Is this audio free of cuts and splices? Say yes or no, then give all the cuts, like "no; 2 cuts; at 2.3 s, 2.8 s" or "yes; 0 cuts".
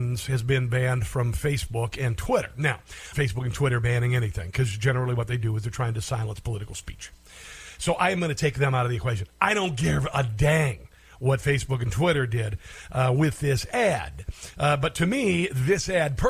no; 1 cut; at 3.1 s